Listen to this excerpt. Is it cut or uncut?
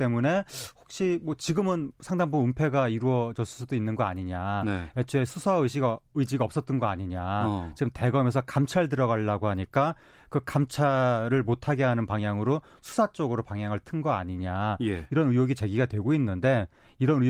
uncut